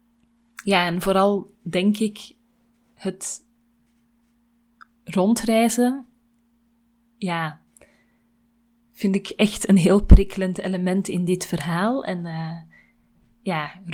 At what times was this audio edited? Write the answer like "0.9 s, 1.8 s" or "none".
none